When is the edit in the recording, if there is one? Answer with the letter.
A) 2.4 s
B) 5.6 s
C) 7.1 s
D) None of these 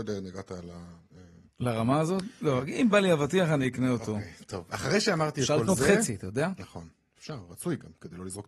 D